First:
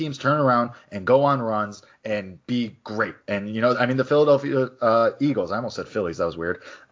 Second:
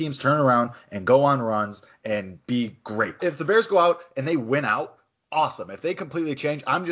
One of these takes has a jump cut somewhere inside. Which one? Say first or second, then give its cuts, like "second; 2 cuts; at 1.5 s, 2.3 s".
second; 1 cut; at 3.2 s